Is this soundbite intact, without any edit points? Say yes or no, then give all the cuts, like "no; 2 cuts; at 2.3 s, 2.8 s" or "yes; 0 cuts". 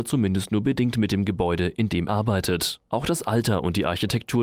no; 1 cut; at 2.1 s